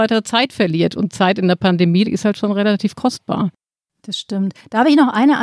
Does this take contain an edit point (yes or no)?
yes